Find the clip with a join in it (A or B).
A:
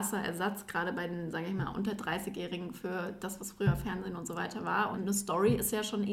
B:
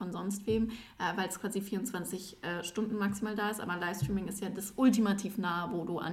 A